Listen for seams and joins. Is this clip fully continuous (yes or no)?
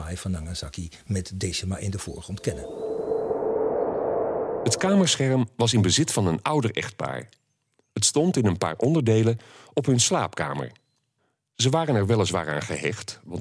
yes